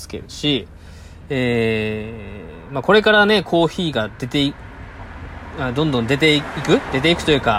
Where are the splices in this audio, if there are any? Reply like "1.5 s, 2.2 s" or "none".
none